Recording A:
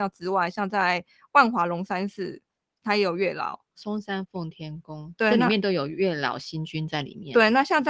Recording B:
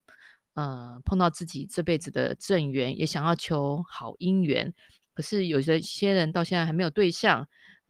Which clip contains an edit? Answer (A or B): A